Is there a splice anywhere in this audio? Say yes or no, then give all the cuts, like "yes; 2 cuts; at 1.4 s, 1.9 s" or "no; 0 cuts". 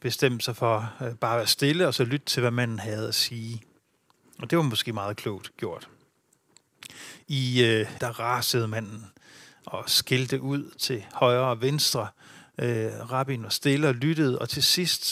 yes; 1 cut; at 8.0 s